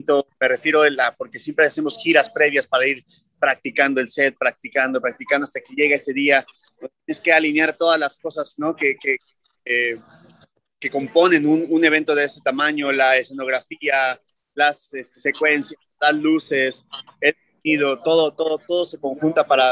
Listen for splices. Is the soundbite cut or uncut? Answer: uncut